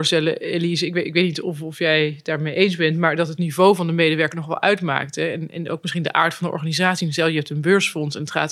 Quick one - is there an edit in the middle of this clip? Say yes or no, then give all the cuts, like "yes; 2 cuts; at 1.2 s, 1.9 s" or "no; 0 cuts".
no; 0 cuts